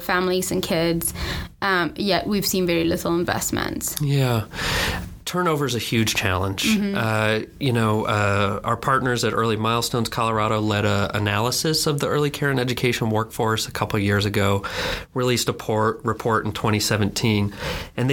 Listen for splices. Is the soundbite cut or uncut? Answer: uncut